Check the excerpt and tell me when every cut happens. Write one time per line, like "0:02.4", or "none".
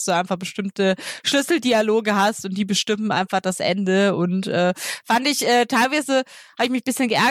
none